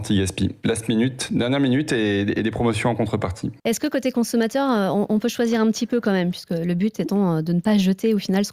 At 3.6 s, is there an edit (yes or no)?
yes